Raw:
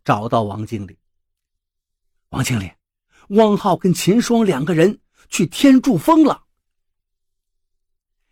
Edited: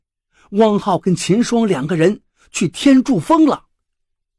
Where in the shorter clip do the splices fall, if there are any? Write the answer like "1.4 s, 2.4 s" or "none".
none